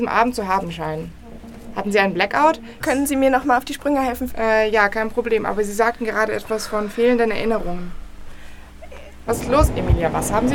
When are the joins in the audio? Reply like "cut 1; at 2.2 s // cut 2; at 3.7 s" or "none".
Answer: cut 1; at 2.8 s // cut 2; at 4.3 s // cut 3; at 9.3 s